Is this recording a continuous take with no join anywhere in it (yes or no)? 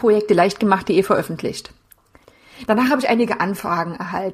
yes